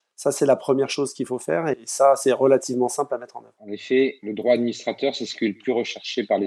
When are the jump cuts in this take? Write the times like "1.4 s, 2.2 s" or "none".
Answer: 3.6 s